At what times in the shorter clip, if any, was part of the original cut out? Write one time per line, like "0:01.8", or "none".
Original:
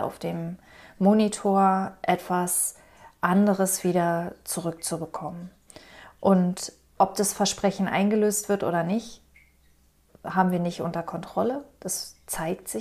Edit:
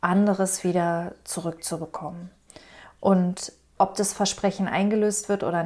none